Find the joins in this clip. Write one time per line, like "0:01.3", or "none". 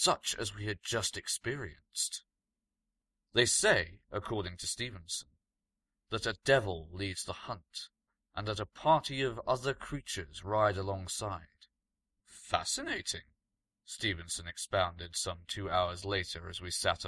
0:12.2

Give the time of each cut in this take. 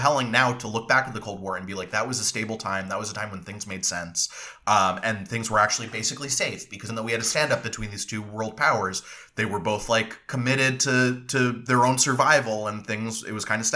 0:06.9

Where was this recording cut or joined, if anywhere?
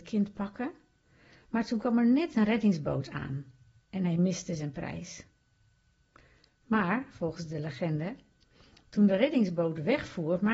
none

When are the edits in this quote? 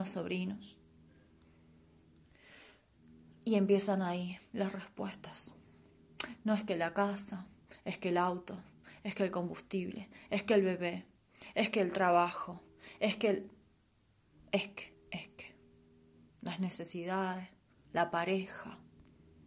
none

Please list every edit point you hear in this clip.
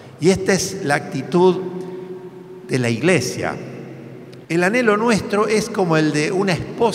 0:04.4

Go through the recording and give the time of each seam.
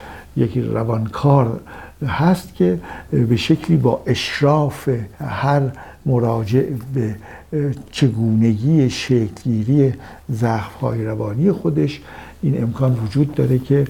0:05.1

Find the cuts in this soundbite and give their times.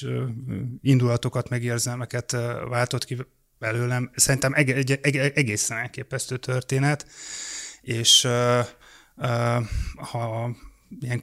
none

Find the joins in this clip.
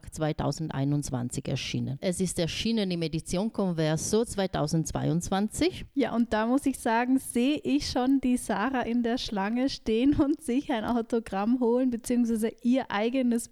0:02.0

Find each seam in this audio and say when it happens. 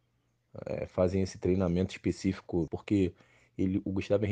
0:02.7

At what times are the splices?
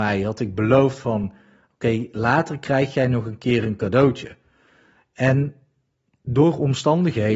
none

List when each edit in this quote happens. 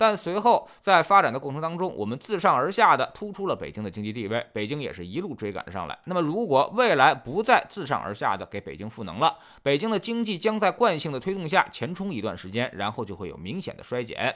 0:06.0

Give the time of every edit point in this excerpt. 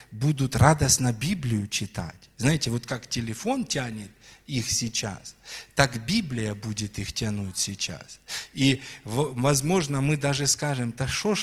none

